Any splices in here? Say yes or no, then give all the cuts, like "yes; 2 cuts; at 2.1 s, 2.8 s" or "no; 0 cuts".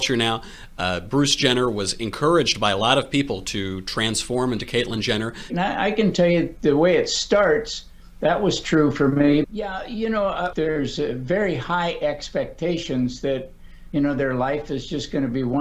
yes; 3 cuts; at 5.5 s, 9.4 s, 10.5 s